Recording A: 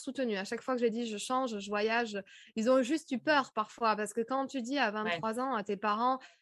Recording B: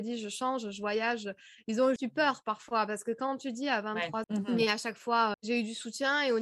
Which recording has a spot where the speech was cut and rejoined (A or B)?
B